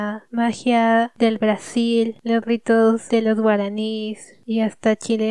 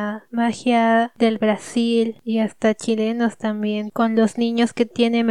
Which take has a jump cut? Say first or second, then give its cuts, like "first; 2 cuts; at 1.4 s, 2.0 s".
second; 1 cut; at 2.2 s